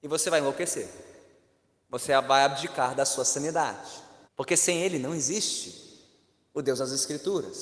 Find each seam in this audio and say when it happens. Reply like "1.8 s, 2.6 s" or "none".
4.2 s